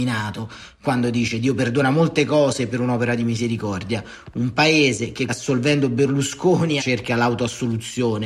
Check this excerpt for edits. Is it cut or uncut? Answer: cut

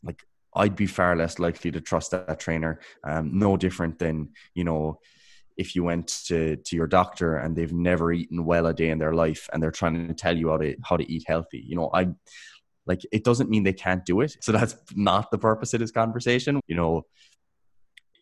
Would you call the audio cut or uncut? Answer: cut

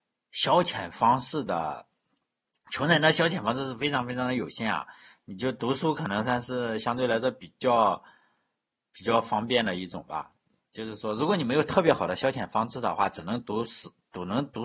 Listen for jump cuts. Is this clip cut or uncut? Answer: uncut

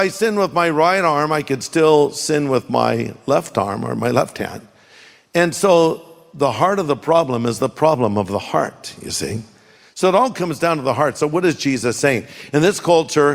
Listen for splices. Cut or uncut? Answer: uncut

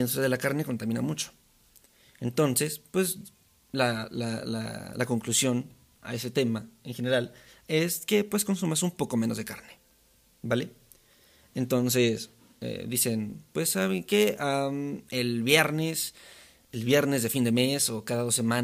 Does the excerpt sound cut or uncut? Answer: uncut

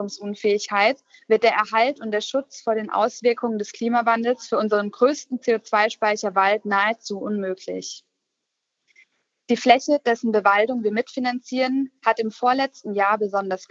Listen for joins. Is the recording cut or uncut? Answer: uncut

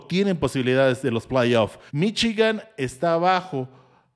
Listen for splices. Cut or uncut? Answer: cut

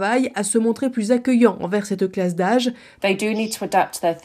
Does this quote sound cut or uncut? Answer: cut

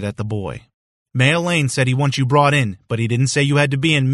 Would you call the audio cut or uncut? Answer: cut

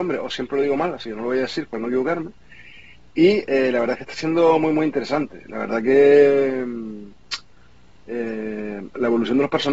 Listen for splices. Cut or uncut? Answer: uncut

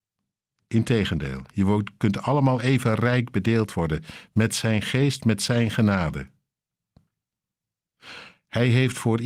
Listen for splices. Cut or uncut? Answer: uncut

